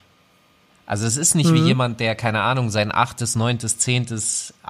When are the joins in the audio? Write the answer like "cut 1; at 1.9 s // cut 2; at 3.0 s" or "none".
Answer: none

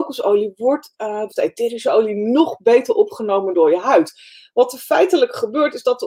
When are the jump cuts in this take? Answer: cut 1; at 1.3 s

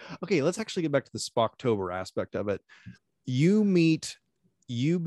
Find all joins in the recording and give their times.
cut 1; at 2.9 s

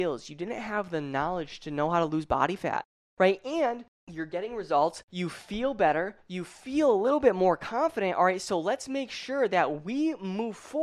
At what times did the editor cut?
none

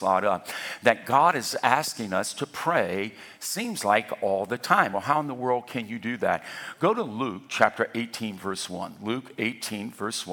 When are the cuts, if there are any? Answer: none

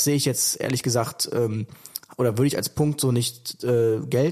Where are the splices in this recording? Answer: none

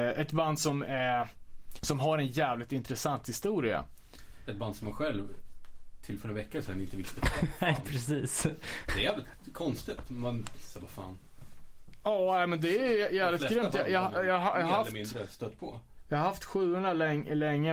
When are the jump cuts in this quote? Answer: cut 1; at 1.8 s

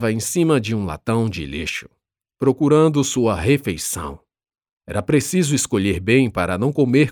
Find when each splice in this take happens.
none

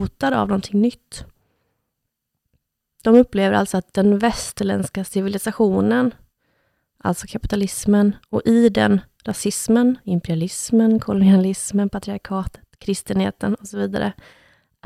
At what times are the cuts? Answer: none

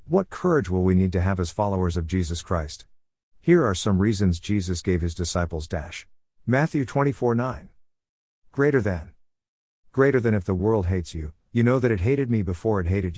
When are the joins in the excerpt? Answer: cut 1; at 6.3 s

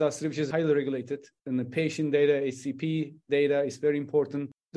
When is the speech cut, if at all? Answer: none

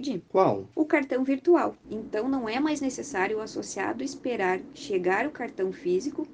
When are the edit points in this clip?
cut 1; at 1.8 s

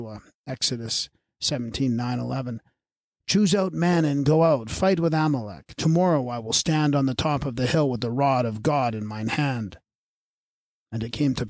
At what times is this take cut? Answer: none

